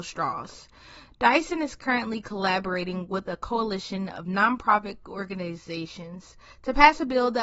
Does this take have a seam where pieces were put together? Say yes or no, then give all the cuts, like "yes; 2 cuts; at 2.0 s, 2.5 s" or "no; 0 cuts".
no; 0 cuts